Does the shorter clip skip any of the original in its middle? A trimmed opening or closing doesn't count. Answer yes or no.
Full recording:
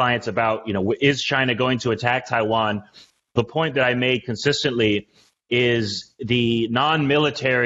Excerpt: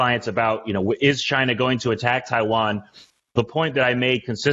no